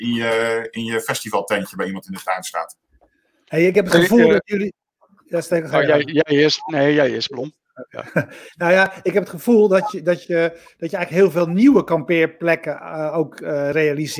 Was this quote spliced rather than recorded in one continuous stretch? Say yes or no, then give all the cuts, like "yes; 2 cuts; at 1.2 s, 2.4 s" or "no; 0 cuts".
no; 0 cuts